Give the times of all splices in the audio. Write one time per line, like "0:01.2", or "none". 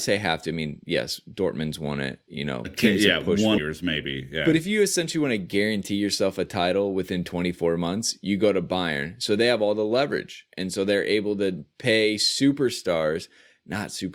0:03.6